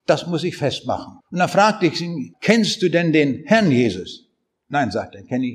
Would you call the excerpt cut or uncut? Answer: cut